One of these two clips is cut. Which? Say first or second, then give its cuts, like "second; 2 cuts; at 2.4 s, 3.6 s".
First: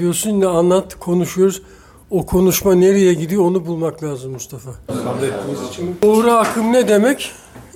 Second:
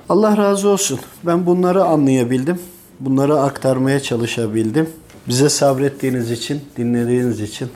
first; 1 cut; at 4.9 s